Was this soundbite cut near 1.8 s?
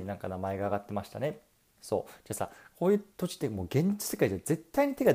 yes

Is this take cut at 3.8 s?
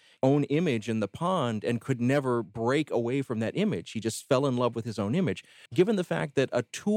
no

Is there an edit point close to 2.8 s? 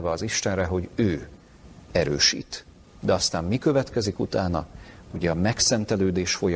yes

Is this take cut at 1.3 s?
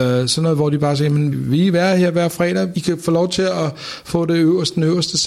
yes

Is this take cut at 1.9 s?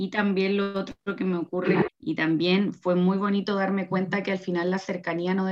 yes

